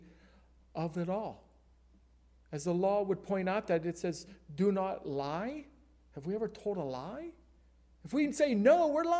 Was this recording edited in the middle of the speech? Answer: no; 0 cuts

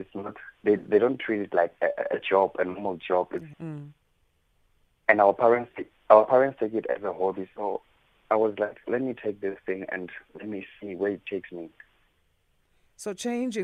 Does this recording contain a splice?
yes; 1 cut; at 3.5 s

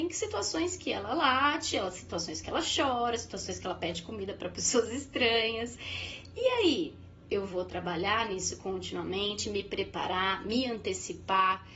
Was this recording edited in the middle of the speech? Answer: no; 0 cuts

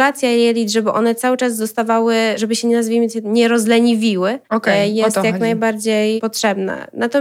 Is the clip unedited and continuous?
no; 1 cut; at 4.4 s

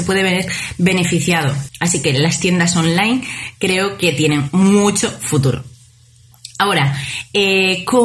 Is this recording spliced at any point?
yes; 1 cut; at 1.7 s

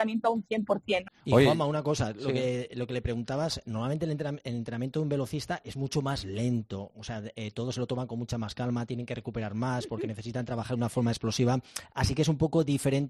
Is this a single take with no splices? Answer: no; 1 cut; at 1.1 s

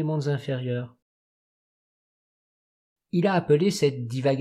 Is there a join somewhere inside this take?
no; 0 cuts

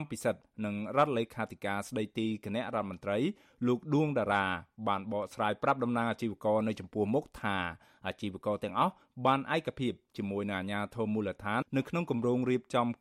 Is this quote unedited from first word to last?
no; 1 cut; at 11.6 s

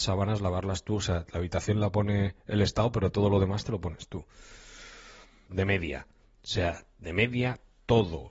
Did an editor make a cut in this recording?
yes; 1 cut; at 5.5 s

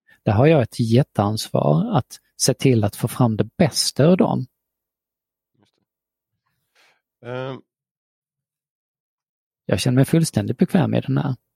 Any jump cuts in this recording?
yes; 1 cut; at 9.5 s

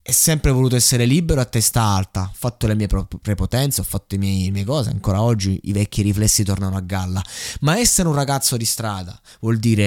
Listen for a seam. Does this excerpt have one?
no; 0 cuts

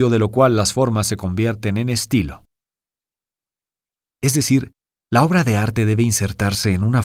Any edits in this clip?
yes; 1 cut; at 4.1 s

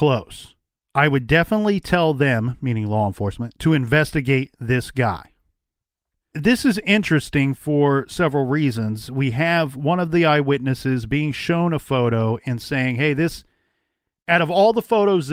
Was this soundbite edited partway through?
no; 0 cuts

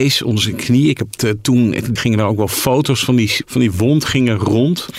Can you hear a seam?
yes; 2 cuts; at 2.0 s, 3.4 s

